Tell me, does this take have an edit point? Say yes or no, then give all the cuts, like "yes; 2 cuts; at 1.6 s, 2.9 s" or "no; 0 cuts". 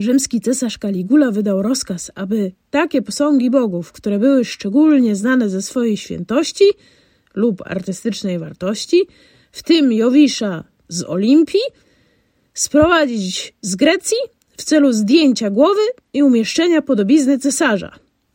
yes; 1 cut; at 10.8 s